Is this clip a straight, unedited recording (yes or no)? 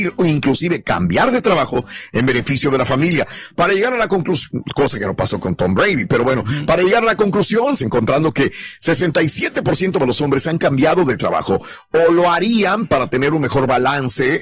no